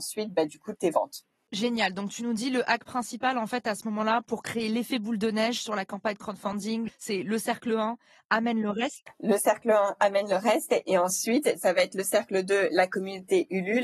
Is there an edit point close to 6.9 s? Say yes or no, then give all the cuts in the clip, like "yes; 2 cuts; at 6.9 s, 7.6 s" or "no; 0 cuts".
yes; 1 cut; at 6.9 s